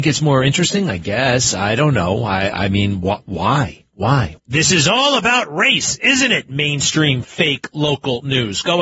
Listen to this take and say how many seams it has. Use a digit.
1